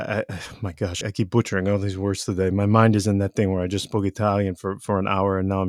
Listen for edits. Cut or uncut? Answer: cut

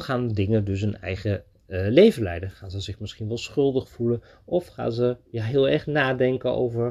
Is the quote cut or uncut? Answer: uncut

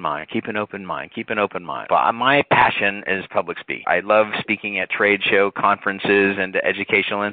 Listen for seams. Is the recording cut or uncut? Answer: cut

